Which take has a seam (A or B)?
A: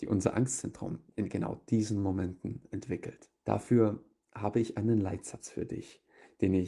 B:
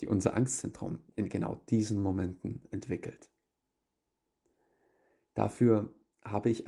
A